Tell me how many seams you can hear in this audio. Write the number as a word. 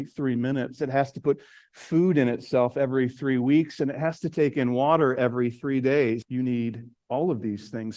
one